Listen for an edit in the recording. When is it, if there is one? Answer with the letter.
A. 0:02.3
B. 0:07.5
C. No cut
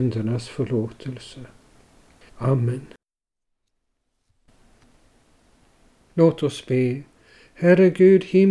A